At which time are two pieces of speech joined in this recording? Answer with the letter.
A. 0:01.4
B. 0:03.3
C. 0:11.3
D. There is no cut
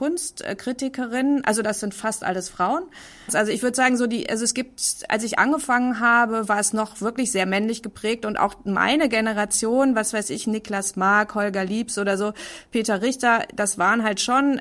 B